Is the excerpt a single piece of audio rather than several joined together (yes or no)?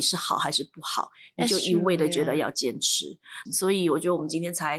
no